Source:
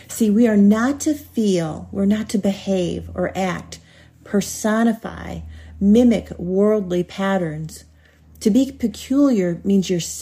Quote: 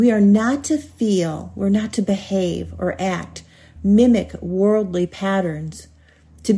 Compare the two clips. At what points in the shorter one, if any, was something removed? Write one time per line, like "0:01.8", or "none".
0:03.8